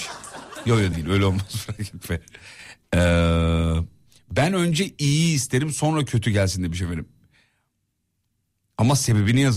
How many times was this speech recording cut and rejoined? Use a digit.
1